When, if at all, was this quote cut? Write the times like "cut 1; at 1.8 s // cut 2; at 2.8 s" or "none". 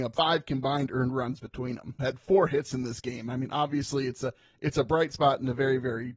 cut 1; at 2.0 s